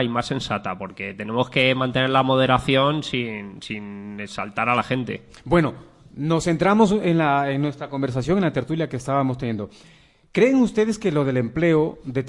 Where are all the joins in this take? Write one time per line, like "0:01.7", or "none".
none